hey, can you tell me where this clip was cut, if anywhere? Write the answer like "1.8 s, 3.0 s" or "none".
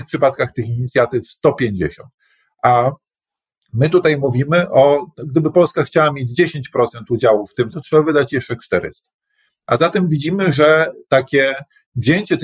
7.7 s